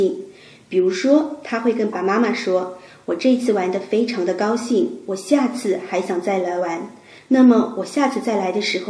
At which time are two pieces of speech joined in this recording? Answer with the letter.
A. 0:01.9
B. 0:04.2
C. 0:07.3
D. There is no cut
A